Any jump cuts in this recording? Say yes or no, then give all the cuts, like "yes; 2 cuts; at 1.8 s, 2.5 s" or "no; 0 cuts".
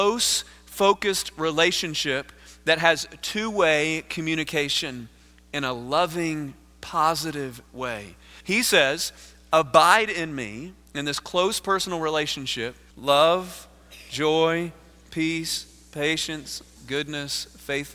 yes; 3 cuts; at 8.4 s, 12.9 s, 16.8 s